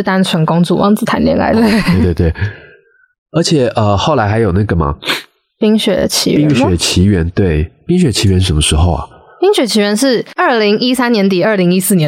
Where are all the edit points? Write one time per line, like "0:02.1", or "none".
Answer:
0:01.5